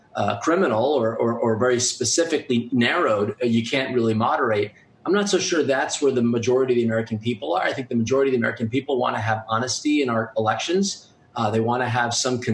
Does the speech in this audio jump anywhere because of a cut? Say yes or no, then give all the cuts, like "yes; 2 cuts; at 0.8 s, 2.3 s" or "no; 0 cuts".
yes; 1 cut; at 2.7 s